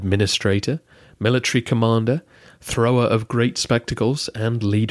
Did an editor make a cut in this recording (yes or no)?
no